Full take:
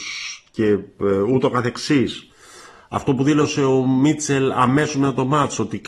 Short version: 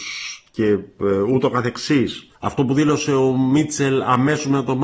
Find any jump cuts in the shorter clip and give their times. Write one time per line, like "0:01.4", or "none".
0:02.3